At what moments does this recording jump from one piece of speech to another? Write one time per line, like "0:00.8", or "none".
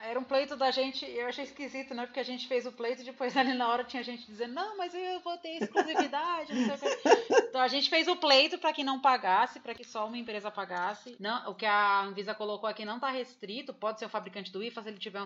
0:11.2